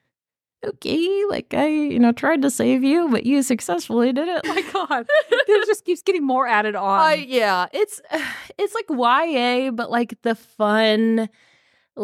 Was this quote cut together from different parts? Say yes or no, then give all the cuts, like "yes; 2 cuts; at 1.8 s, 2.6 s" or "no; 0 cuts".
yes; 1 cut; at 4.4 s